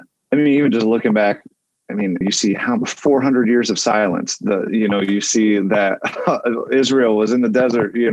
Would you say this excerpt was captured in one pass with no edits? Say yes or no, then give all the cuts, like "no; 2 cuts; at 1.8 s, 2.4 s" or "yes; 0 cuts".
no; 1 cut; at 2.2 s